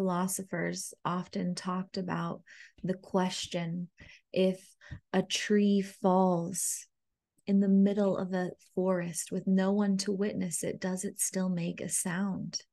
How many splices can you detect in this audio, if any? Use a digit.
0